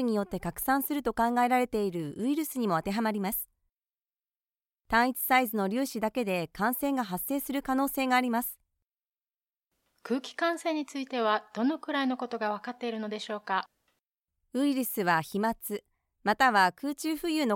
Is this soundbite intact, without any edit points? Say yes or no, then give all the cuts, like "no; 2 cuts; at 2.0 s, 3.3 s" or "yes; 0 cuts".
yes; 0 cuts